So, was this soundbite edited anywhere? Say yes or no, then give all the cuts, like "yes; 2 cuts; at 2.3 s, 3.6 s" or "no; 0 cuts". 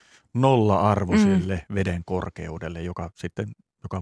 no; 0 cuts